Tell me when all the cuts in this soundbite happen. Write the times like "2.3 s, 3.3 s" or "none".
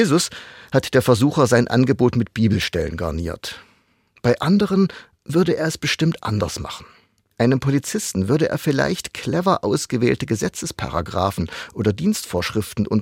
none